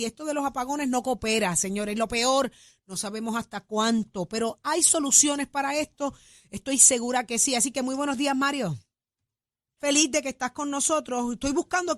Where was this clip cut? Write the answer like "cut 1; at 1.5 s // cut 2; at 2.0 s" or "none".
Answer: cut 1; at 9.8 s